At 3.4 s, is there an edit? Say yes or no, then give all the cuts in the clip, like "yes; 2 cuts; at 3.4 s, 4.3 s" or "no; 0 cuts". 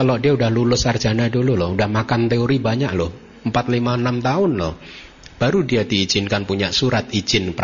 no; 0 cuts